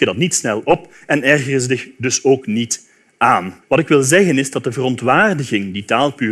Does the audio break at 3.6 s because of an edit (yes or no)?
yes